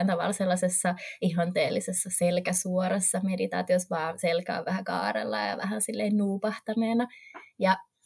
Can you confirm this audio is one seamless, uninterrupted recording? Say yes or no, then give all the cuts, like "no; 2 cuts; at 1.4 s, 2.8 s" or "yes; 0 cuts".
yes; 0 cuts